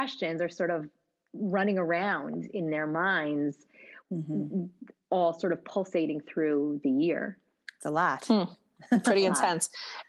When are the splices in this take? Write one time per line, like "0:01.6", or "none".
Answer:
0:04.0